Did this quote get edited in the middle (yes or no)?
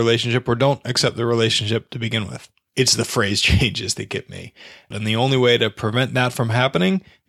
yes